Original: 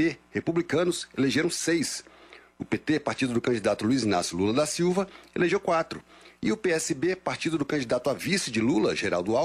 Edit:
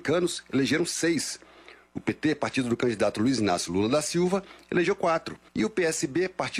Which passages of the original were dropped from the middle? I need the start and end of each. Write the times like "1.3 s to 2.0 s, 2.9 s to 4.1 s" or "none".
6.1 s to 6.4 s